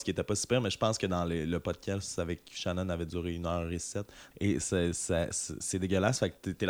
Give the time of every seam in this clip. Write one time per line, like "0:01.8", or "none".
0:04.3